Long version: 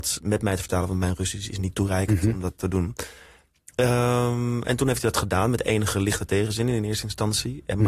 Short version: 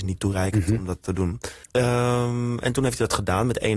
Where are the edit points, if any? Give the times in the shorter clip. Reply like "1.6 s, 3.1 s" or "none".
1.6 s